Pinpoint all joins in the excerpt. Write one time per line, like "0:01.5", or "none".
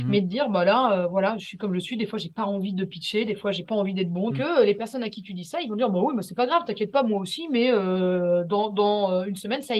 0:04.3